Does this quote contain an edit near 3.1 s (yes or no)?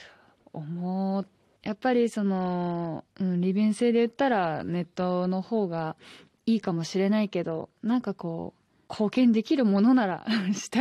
yes